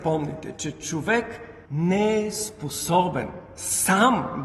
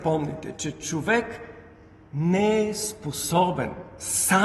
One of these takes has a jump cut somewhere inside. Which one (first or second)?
first